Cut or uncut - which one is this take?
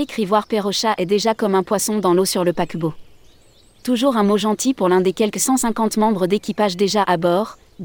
uncut